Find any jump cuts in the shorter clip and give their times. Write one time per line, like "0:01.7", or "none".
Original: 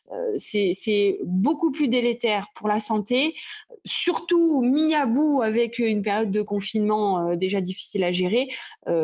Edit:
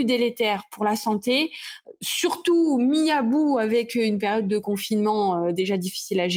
none